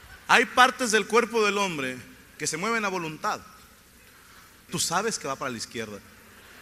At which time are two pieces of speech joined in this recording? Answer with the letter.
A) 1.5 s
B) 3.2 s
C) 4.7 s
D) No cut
C